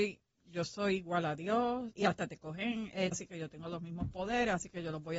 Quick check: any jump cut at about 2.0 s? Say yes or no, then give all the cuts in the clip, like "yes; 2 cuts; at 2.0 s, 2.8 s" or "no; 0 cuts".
yes; 2 cuts; at 2.0 s, 3.1 s